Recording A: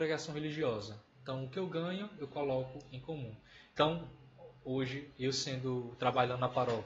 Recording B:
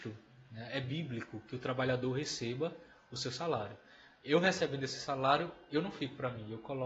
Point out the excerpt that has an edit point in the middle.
A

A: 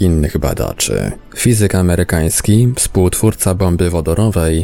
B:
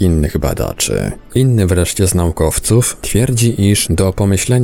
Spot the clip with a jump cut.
B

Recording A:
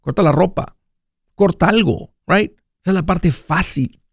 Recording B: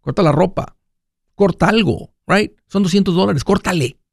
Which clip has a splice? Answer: A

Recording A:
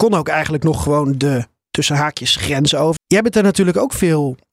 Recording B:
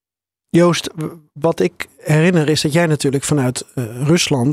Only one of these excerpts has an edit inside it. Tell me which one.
A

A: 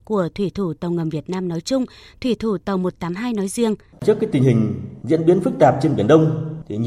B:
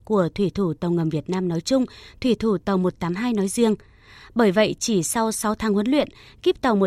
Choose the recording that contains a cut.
A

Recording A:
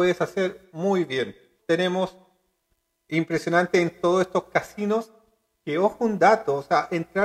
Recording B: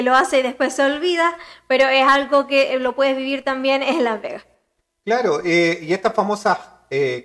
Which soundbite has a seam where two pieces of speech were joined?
A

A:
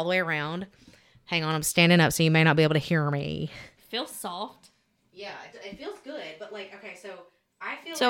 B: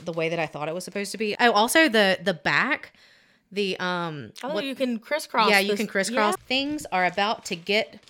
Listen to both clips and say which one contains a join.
B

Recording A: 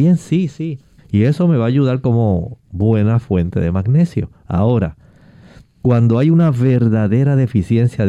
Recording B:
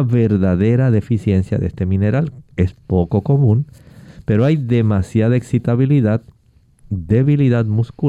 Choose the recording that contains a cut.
A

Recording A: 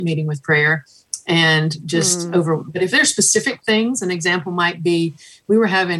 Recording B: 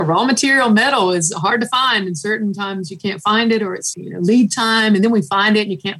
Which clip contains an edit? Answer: B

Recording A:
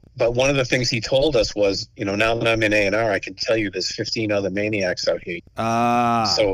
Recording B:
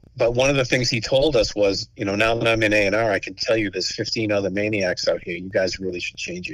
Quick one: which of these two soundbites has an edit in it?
A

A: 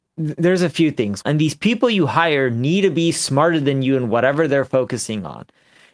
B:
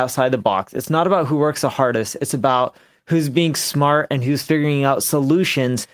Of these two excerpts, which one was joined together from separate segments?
A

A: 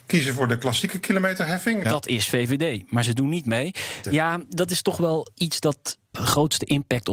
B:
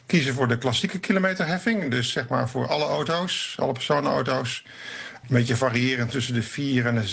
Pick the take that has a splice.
A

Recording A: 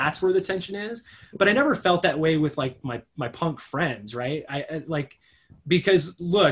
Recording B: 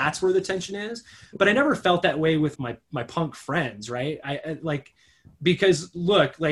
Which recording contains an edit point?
B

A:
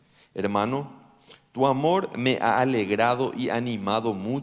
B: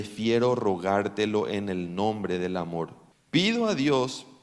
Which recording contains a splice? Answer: B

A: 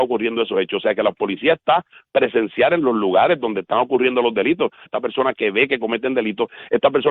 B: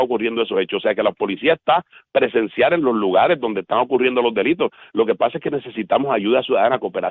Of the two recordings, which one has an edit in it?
A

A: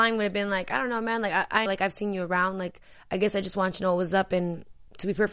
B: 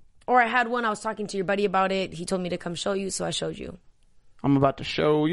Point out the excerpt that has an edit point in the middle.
A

